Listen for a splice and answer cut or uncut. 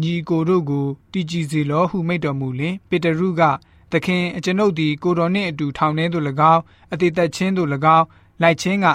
cut